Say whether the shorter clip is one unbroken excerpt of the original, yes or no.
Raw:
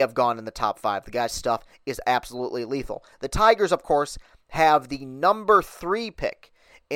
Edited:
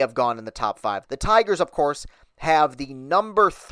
no